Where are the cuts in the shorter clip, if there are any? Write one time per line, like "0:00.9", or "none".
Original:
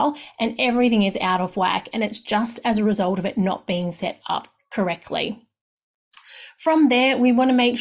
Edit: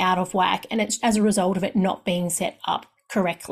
0:01.0